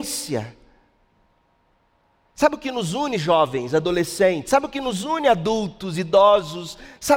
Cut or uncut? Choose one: uncut